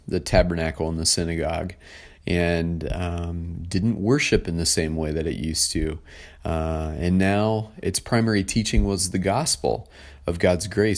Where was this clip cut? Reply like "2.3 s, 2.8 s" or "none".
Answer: none